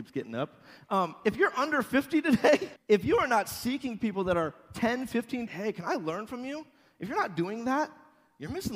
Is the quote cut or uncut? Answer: cut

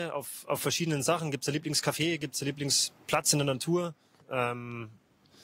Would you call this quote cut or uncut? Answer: cut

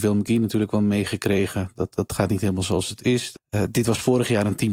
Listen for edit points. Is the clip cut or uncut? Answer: cut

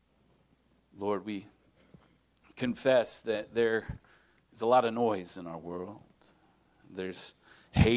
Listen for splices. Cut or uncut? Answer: uncut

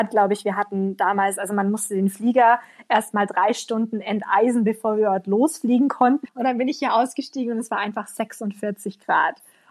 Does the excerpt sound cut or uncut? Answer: cut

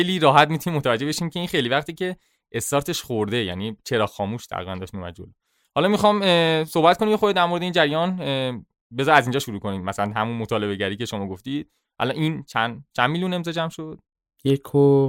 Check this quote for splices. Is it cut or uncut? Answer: uncut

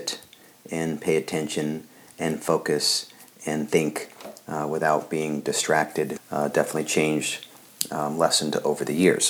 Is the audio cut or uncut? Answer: cut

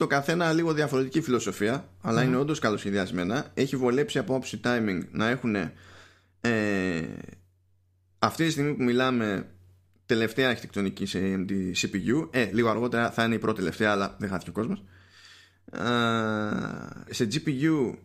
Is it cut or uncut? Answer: cut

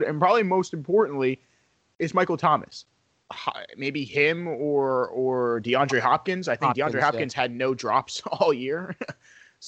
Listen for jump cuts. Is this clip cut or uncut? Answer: cut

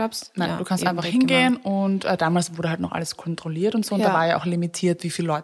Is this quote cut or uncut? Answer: uncut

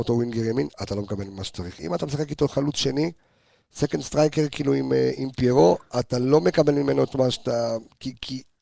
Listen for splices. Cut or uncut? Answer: uncut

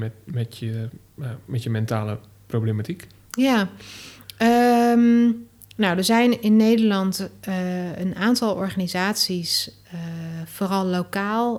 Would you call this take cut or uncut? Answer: uncut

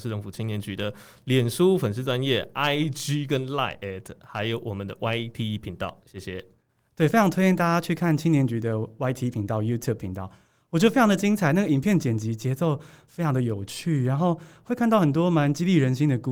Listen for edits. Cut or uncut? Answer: uncut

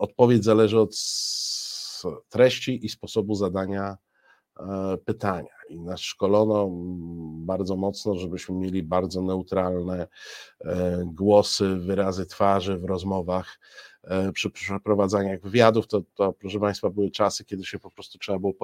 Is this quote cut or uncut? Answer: uncut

